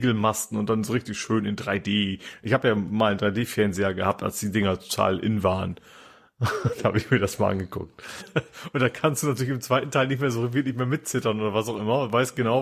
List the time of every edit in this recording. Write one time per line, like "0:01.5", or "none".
0:08.2